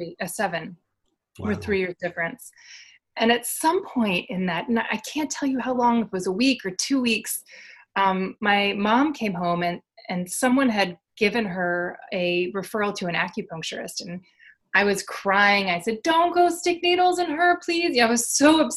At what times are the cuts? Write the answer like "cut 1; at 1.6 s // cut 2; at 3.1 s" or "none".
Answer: cut 1; at 3.0 s